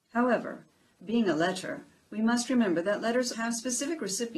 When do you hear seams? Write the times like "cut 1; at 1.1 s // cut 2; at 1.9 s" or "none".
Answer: cut 1; at 3.3 s

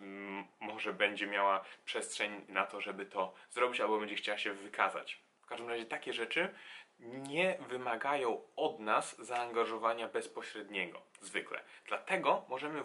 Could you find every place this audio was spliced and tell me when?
none

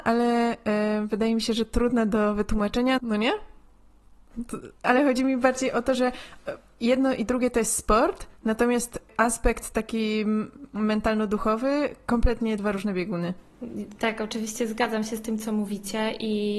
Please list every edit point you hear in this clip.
cut 1; at 3.0 s // cut 2; at 4.8 s

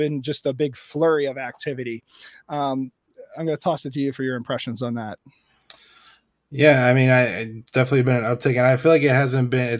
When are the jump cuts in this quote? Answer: none

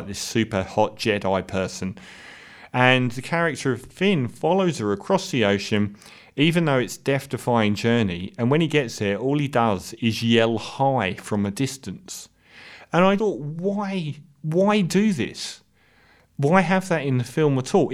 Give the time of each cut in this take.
cut 1; at 13.2 s

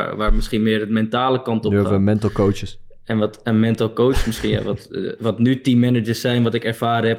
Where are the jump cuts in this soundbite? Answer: none

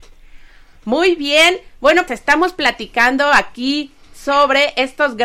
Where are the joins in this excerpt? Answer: cut 1; at 2.1 s

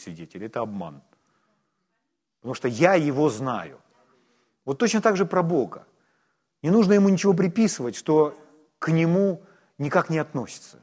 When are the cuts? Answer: none

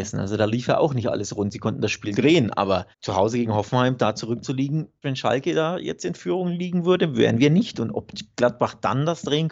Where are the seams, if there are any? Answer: cut 1; at 2.9 s // cut 2; at 5.0 s

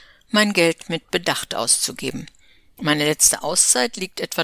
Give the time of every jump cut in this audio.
cut 1; at 2.8 s

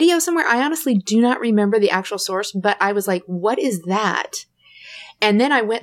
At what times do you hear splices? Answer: none

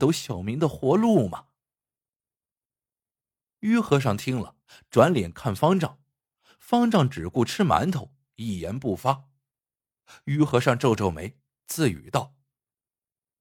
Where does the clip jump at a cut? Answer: none

